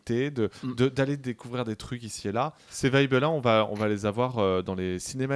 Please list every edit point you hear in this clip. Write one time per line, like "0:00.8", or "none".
0:02.7